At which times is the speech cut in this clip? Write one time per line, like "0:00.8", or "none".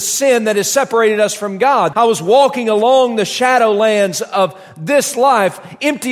0:01.9